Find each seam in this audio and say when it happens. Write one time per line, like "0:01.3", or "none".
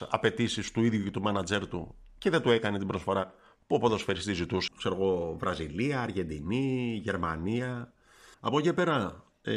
0:04.7
0:08.3

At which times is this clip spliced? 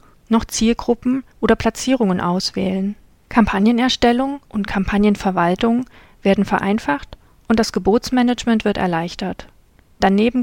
0:03.2
0:04.4

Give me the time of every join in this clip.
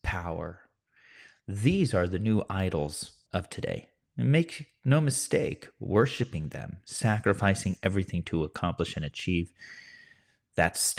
0:03.3

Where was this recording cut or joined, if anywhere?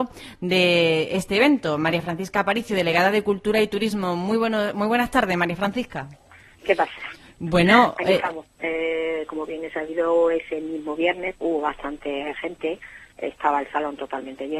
0:06.6
0:08.5
0:11.4

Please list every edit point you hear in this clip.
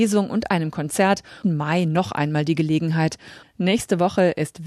0:01.4
0:03.4

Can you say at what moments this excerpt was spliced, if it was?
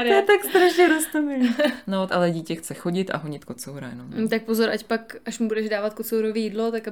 0:02.1

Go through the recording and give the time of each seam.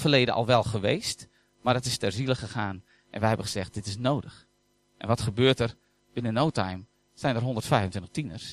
none

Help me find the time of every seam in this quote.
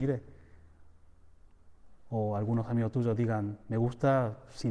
none

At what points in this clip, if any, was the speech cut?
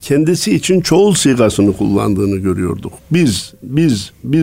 none

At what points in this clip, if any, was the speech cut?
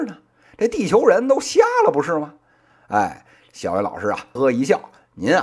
0:04.4

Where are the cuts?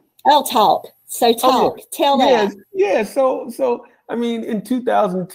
none

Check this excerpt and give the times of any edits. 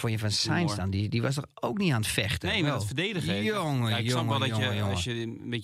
none

